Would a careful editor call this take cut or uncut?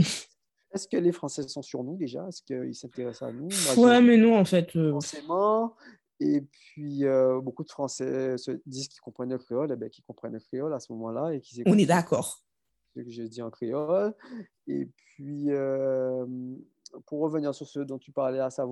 uncut